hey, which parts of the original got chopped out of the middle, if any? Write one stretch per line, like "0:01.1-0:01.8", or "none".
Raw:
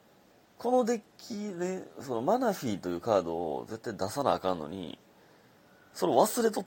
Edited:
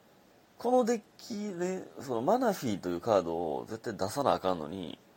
none